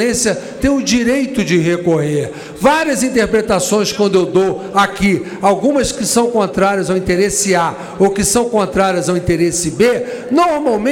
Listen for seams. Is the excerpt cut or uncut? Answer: uncut